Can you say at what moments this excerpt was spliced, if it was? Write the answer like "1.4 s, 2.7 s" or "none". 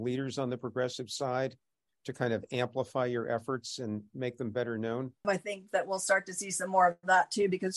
5.2 s